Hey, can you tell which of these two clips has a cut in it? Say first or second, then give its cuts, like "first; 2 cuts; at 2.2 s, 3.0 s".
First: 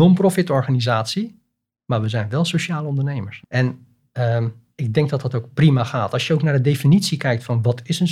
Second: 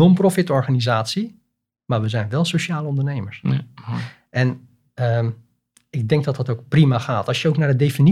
first; 2 cuts; at 3.4 s, 4.7 s